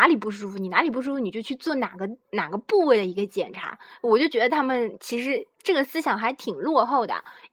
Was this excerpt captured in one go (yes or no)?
yes